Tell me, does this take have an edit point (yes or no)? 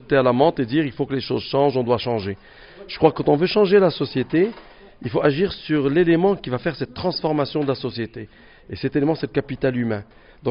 no